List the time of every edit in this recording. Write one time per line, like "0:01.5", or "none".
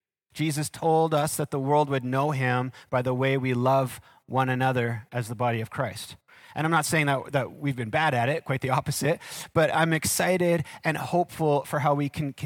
none